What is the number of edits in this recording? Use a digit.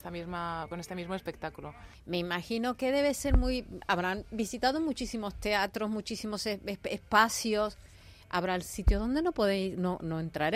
1